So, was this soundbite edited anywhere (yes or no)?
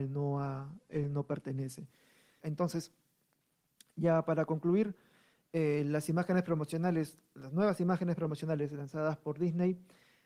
yes